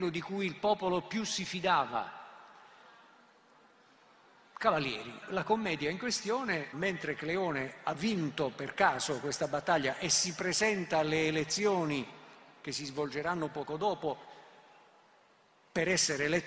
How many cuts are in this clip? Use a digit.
2